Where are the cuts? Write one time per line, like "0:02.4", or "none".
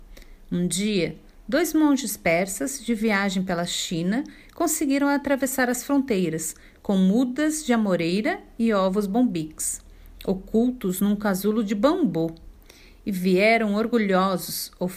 none

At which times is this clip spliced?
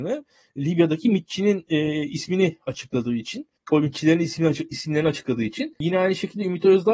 none

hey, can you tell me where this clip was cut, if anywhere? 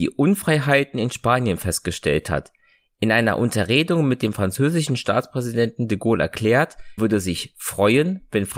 0:07.0

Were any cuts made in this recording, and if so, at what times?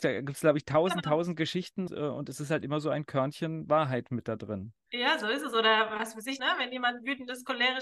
0:01.9
0:06.4

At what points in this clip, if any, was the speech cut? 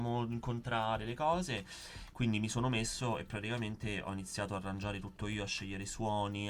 none

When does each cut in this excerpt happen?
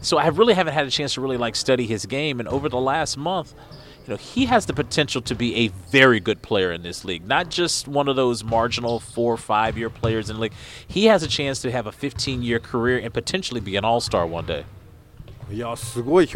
none

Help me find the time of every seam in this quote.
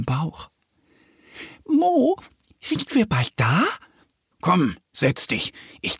0:04.3

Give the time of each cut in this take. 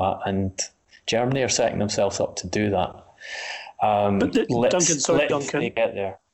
0:05.3

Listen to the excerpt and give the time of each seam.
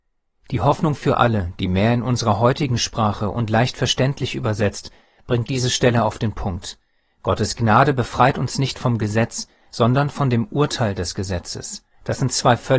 none

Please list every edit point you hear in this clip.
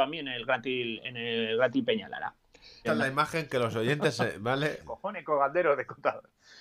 0:02.8
0:04.8

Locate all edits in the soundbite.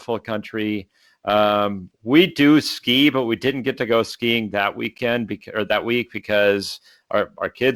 none

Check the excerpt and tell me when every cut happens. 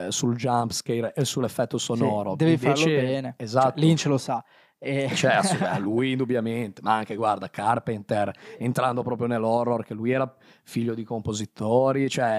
none

